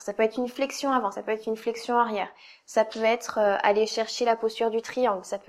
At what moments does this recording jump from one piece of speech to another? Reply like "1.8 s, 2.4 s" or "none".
none